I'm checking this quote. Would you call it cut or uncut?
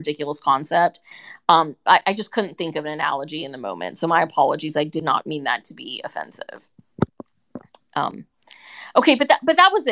uncut